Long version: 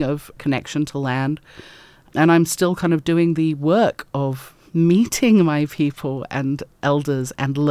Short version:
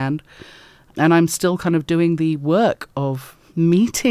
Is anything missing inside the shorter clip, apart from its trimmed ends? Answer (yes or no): no